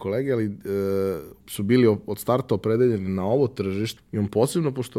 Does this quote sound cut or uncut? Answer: cut